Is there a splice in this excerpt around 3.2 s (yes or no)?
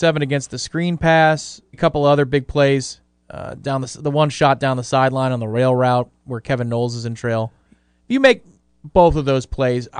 no